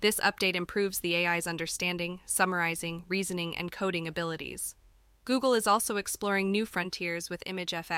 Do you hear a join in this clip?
no; 0 cuts

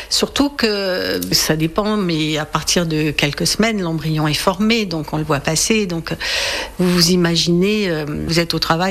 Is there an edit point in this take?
no; 0 cuts

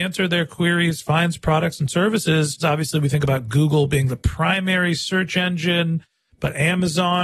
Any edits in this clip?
yes; 1 cut; at 2.6 s

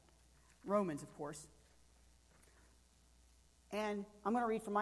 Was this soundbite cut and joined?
no; 0 cuts

